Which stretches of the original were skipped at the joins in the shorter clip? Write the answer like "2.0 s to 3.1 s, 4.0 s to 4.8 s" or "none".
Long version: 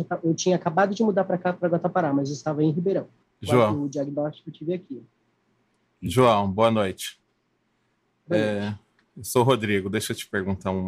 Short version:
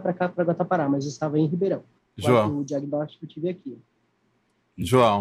none